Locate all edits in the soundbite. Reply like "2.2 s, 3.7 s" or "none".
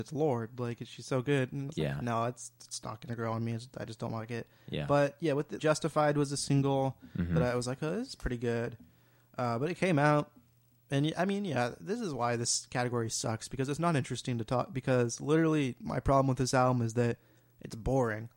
5.6 s